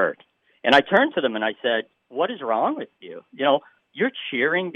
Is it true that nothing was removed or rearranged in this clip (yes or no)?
yes